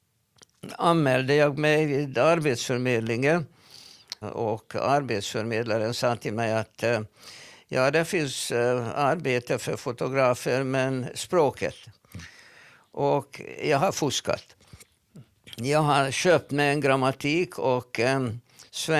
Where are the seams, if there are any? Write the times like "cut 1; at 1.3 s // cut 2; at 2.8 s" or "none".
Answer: cut 1; at 4.2 s